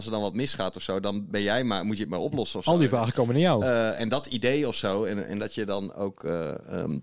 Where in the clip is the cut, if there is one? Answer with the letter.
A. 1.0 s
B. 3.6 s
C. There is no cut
C